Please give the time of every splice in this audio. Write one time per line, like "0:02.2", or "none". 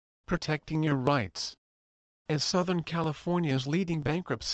none